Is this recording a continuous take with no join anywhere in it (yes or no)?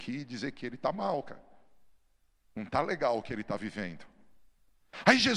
yes